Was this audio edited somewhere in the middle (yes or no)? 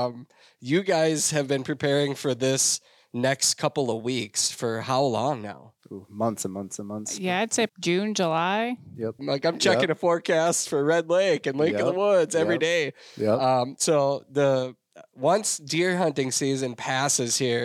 yes